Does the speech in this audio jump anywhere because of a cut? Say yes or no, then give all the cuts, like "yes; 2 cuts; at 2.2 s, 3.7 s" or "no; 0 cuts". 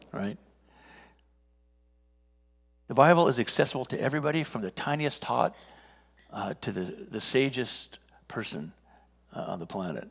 no; 0 cuts